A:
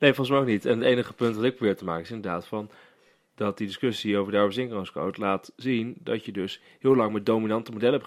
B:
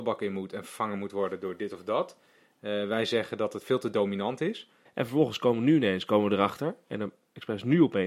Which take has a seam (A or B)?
B